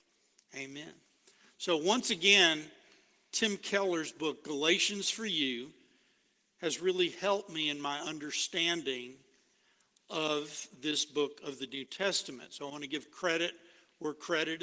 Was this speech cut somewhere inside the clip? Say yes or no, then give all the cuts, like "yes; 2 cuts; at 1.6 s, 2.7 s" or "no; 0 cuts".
no; 0 cuts